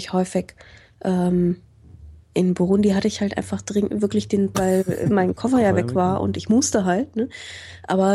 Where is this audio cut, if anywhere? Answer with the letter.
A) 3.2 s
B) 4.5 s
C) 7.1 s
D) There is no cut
B